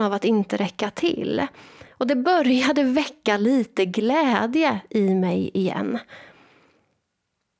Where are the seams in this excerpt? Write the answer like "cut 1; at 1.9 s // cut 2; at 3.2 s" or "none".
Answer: none